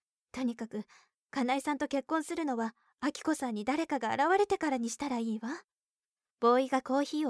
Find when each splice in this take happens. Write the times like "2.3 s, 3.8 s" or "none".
none